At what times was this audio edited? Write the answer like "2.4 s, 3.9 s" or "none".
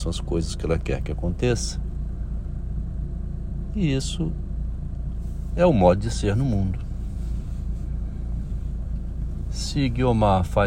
none